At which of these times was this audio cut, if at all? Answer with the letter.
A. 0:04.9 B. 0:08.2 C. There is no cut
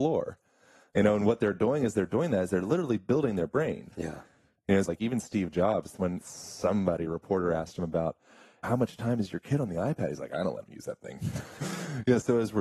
A